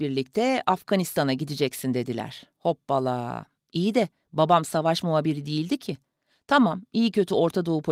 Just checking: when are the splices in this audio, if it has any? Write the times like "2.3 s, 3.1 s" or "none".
none